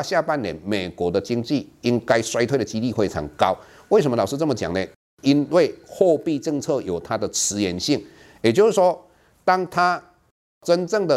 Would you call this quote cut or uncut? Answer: uncut